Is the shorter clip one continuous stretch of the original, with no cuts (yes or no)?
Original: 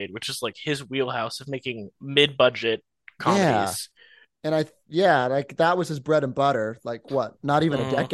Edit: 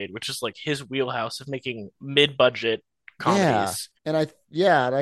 no